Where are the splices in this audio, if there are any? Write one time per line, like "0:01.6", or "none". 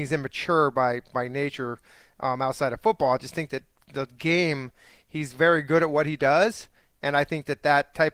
none